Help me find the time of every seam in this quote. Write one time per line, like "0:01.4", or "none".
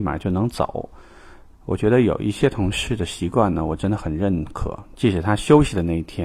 0:01.5
0:04.9

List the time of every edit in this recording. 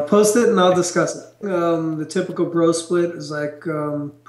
0:01.4

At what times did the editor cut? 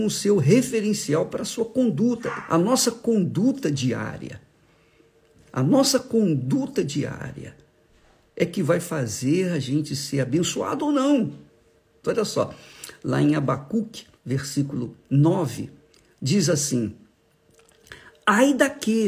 0:02.5
0:12.0
0:14.2

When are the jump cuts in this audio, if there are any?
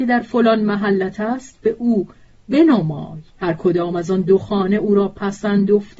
0:03.3

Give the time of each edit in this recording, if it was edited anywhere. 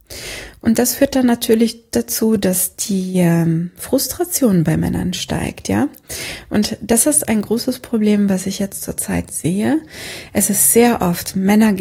none

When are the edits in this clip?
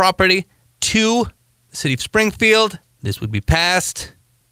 none

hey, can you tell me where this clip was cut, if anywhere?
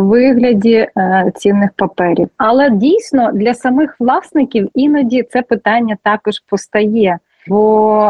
0:02.3

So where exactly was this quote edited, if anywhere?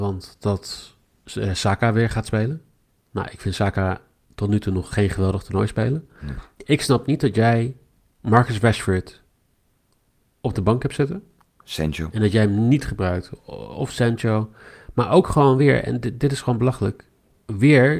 none

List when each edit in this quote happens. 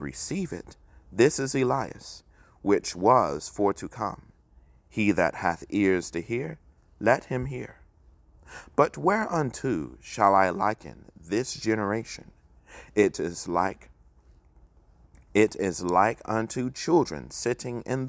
none

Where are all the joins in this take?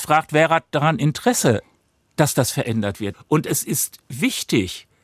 0:03.1

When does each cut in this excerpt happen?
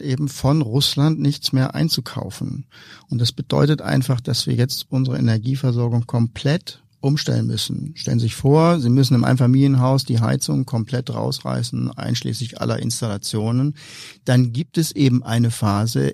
none

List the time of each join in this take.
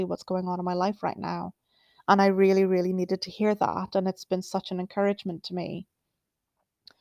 none

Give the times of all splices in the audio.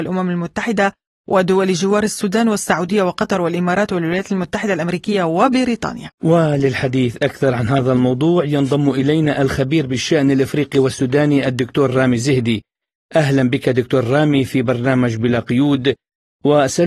none

